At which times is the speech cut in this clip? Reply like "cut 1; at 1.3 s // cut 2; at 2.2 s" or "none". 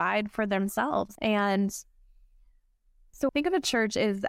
cut 1; at 1.2 s // cut 2; at 3.3 s